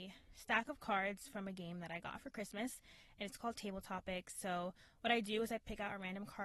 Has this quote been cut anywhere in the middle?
no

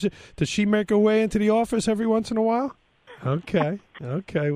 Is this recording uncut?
no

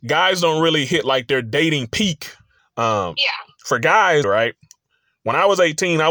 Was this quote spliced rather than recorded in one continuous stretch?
yes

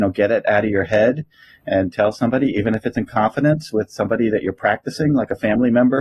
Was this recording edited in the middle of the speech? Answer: no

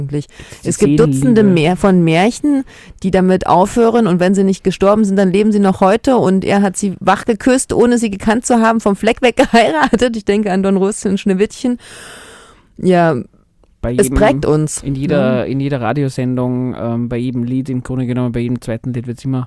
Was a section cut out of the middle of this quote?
no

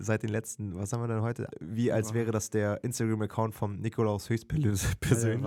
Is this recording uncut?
no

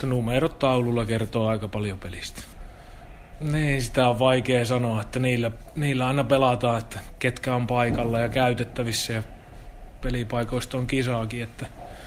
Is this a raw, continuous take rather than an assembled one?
yes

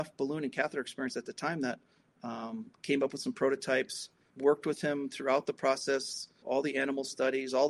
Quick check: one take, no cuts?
no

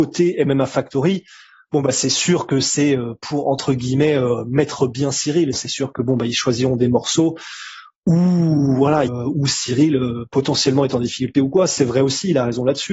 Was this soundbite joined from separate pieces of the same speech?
yes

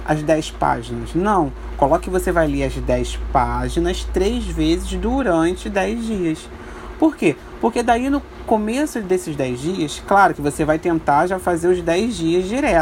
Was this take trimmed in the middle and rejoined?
no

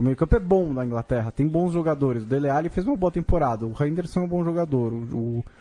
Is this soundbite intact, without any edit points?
yes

